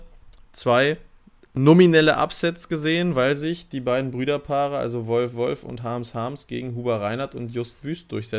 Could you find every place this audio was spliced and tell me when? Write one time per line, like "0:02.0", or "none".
none

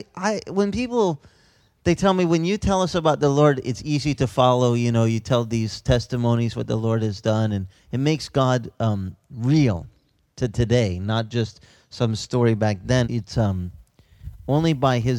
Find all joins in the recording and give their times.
0:13.0

